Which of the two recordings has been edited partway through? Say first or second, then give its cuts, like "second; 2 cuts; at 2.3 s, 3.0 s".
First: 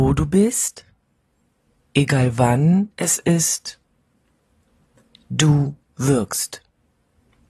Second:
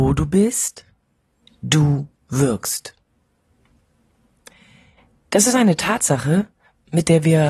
second; 1 cut; at 1.4 s